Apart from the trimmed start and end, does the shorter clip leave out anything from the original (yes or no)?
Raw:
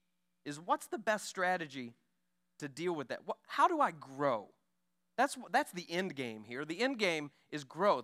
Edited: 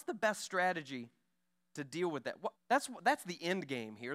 yes